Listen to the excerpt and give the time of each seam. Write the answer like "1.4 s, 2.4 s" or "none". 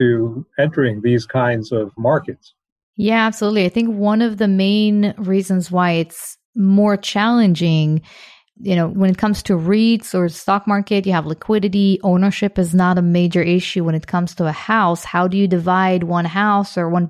none